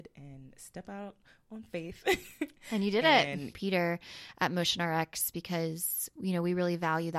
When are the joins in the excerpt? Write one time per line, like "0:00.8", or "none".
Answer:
0:03.5